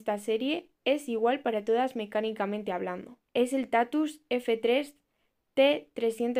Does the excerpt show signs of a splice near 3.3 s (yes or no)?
yes